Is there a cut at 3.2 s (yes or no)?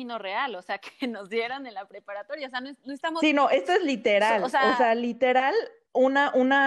no